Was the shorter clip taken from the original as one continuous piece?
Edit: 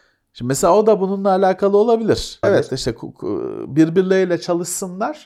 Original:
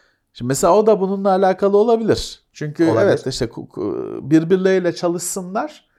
no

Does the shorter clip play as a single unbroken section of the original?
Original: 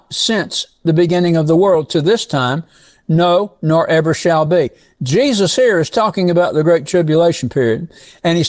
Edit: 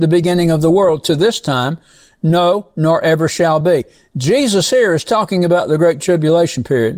yes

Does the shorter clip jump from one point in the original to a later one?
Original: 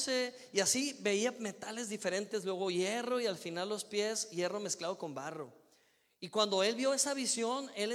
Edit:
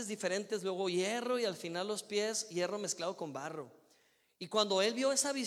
no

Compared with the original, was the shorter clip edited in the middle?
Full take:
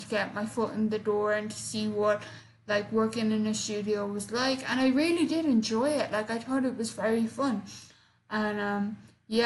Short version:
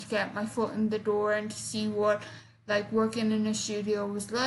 no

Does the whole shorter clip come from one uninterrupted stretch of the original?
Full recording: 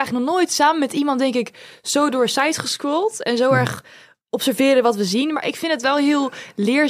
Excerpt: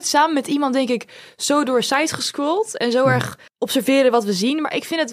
no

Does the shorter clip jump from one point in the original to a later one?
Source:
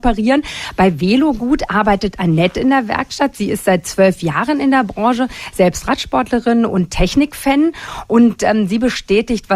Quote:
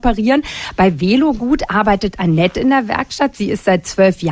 no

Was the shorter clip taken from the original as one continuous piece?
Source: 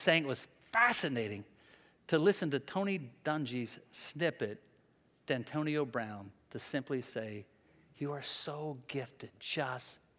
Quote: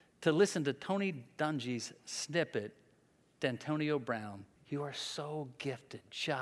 no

